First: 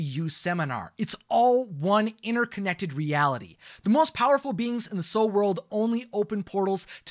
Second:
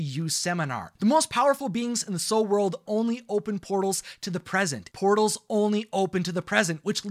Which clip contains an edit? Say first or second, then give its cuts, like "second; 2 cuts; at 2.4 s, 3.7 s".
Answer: second; 2 cuts; at 1.0 s, 4.9 s